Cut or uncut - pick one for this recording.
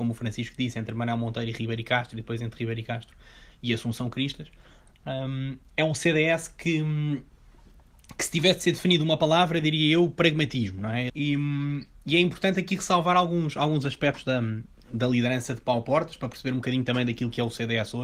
cut